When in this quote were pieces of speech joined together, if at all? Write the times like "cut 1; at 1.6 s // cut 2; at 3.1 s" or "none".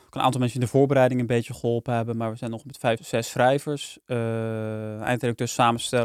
cut 1; at 3.0 s